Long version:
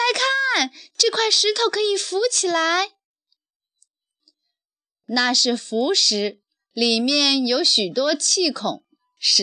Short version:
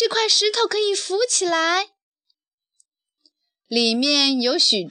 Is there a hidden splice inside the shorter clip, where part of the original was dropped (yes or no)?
yes